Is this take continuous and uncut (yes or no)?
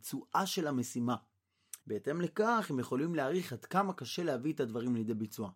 no